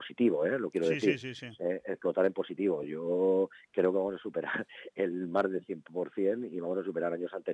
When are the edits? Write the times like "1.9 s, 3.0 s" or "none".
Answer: none